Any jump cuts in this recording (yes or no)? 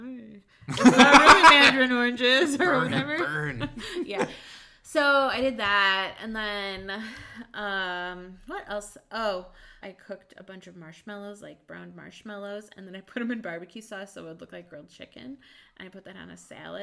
yes